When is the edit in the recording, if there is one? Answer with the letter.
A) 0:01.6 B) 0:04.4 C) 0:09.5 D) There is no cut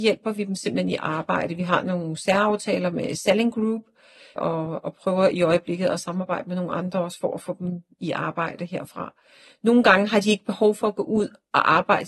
B